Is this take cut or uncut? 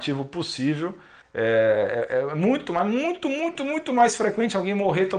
cut